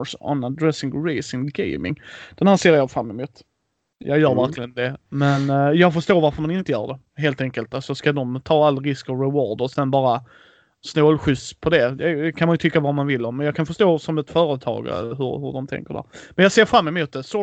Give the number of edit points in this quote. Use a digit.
1